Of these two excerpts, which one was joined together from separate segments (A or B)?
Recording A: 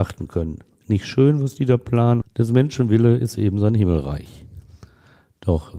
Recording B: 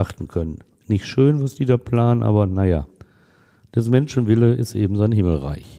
A